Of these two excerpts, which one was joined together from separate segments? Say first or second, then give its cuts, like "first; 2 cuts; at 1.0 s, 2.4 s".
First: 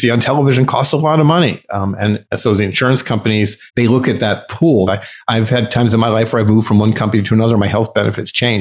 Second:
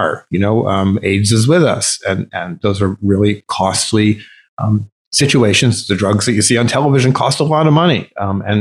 first; 2 cuts; at 3.7 s, 4.9 s